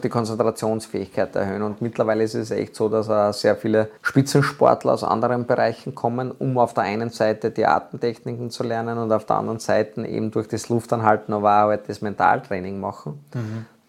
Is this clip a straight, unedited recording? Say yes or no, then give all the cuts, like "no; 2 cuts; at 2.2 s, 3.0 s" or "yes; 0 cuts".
no; 1 cut; at 4.0 s